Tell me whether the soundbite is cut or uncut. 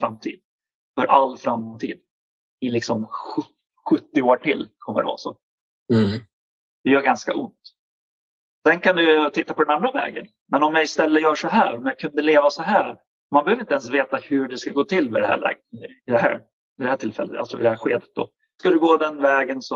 cut